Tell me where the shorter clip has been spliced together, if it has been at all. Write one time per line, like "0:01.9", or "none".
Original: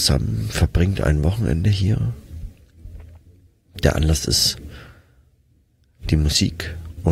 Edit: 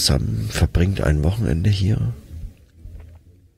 none